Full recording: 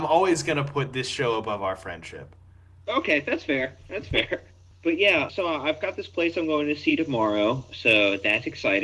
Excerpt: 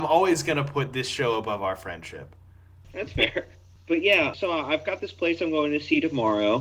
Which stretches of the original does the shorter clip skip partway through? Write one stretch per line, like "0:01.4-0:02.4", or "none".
0:02.8-0:03.8